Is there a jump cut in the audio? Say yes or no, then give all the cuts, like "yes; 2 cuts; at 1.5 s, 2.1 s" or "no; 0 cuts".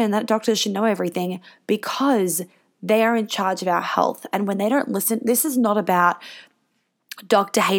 no; 0 cuts